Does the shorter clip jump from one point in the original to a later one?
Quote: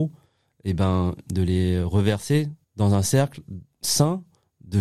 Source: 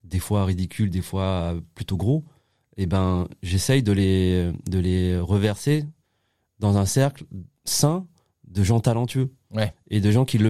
yes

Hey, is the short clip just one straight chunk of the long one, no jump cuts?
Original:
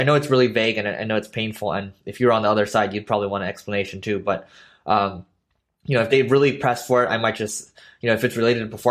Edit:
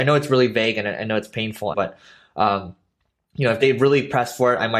no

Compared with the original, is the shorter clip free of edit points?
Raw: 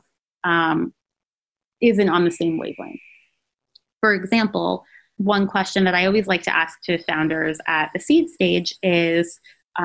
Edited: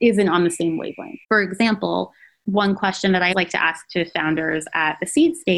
no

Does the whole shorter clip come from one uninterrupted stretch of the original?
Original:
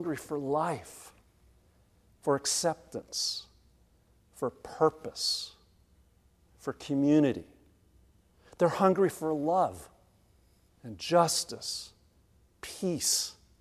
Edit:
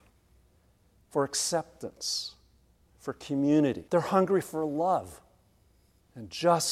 no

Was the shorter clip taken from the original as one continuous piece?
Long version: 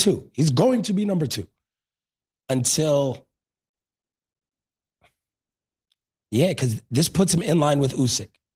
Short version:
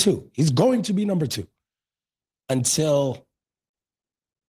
yes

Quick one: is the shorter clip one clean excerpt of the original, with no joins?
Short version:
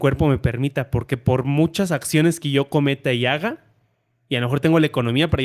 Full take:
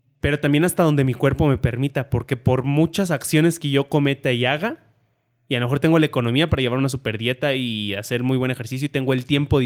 yes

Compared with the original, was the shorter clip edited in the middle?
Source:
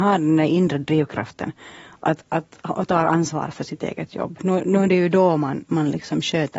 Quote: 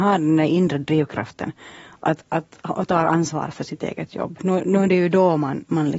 no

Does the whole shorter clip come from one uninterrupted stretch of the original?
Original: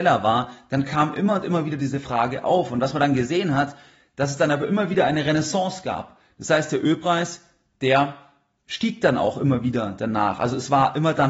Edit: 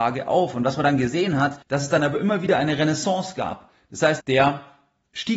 no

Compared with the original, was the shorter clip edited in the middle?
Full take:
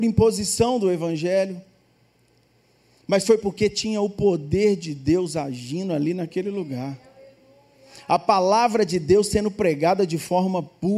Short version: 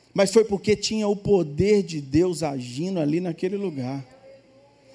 no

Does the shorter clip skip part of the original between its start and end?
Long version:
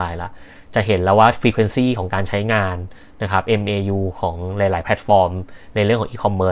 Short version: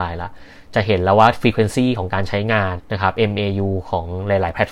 yes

